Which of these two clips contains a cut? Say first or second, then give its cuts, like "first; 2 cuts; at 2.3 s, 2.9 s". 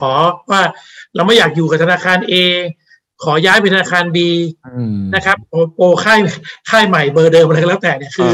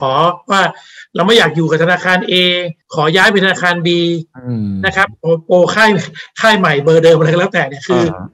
second; 1 cut; at 2.8 s